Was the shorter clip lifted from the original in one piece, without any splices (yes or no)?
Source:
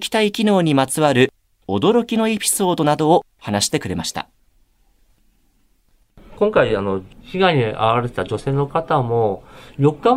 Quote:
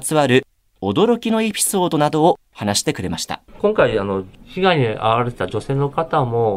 no